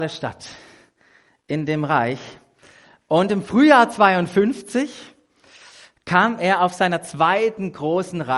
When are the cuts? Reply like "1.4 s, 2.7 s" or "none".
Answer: none